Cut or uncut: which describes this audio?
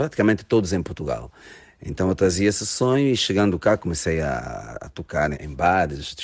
cut